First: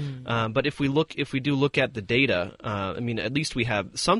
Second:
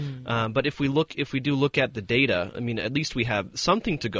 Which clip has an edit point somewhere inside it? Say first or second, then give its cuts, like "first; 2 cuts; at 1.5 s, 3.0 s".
second; 1 cut; at 2.5 s